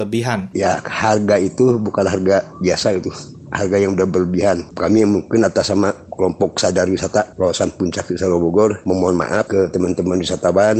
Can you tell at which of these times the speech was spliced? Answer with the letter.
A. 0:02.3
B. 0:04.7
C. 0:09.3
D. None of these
B